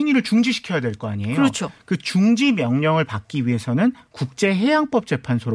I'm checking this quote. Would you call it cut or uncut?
uncut